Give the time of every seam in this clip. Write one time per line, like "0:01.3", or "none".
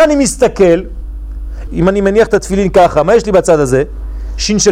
0:01.7